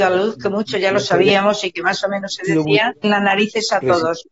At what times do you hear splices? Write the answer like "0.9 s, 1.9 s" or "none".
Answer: 3.0 s